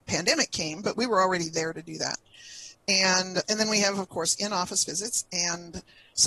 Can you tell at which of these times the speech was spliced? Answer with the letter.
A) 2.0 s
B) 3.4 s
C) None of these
B